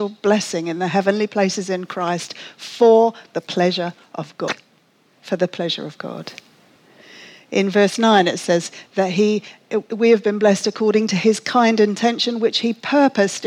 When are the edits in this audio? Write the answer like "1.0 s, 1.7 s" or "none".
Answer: none